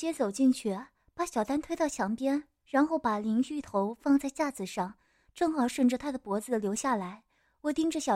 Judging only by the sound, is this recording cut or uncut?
cut